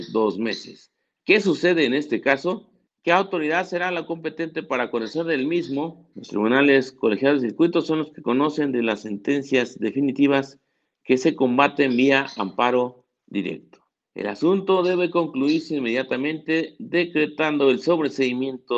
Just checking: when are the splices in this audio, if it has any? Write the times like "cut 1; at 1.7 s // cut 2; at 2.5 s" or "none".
cut 1; at 2.9 s // cut 2; at 6.1 s // cut 3; at 14.1 s